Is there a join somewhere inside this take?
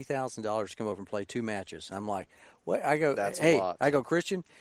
no; 0 cuts

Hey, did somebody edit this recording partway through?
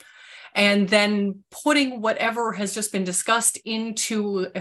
no; 0 cuts

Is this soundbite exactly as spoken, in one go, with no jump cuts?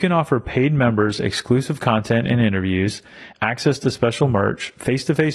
no; 1 cut; at 3.3 s

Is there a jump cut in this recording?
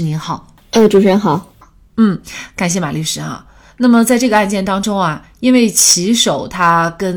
no; 0 cuts

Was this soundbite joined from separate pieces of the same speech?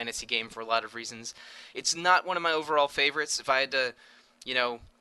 no; 0 cuts

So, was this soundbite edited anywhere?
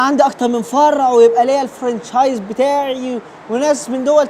no; 0 cuts

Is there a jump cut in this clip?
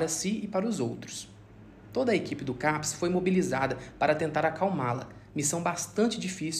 no; 0 cuts

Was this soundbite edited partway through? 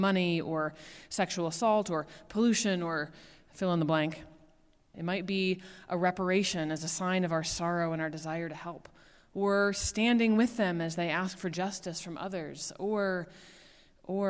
yes; 1 cut; at 4.9 s

